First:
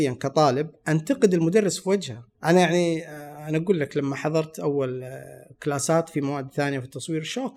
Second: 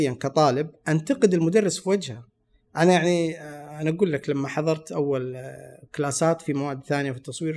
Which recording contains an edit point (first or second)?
first